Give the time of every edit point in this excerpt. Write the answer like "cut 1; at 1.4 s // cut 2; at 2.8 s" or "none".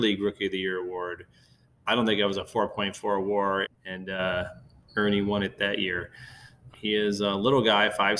cut 1; at 3.6 s // cut 2; at 6.7 s